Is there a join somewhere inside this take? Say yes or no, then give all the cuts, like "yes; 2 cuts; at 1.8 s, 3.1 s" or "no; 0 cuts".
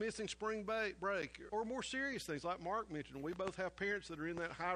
yes; 1 cut; at 1.5 s